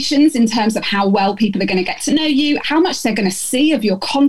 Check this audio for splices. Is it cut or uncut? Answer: cut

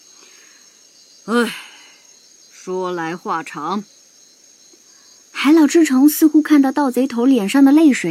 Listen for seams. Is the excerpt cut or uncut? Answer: cut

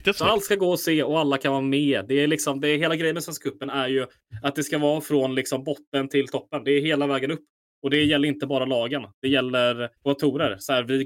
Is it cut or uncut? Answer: cut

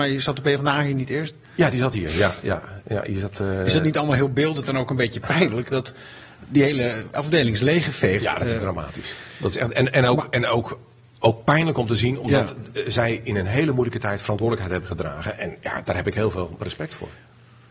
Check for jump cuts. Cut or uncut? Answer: uncut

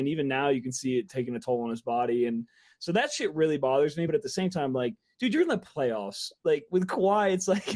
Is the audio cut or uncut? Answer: uncut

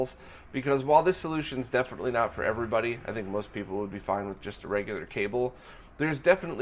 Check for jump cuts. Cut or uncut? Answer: uncut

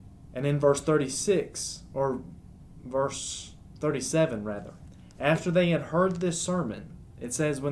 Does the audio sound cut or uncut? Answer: uncut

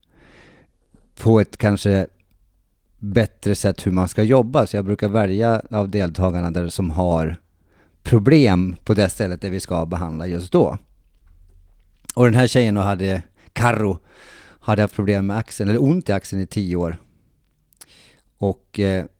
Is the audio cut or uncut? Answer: uncut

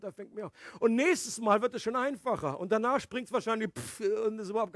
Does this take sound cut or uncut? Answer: uncut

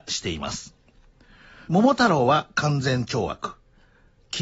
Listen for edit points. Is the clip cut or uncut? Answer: cut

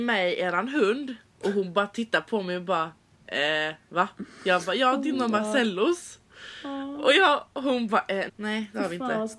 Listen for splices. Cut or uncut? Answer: cut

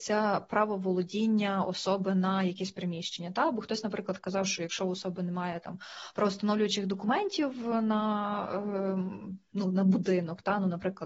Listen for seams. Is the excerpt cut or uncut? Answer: uncut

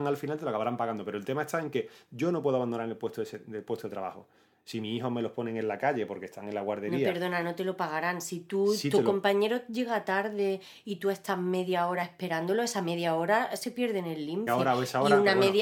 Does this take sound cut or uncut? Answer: cut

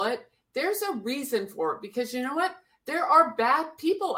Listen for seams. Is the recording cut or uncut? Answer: uncut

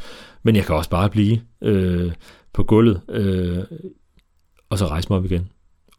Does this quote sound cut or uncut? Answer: uncut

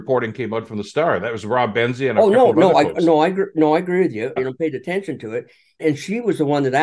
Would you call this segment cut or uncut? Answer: cut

